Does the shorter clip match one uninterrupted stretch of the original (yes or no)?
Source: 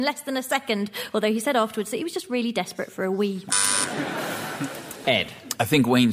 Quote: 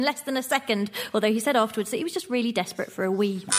yes